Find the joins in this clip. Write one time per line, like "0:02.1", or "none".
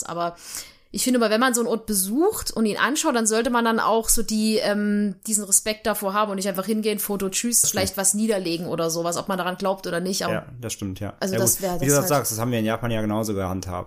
0:07.6
0:10.3